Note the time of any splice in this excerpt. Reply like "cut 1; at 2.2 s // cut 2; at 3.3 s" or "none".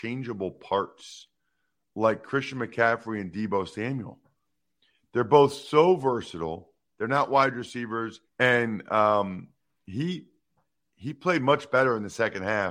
cut 1; at 6.9 s // cut 2; at 8.3 s